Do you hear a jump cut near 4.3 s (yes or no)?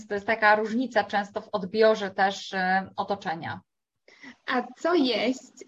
no